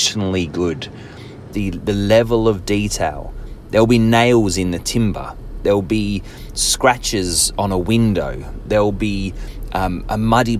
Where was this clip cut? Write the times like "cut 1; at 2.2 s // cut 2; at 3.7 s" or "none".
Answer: cut 1; at 1.5 s